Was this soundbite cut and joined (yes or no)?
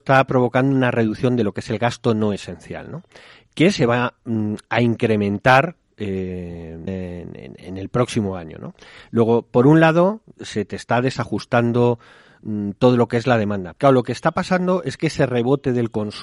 yes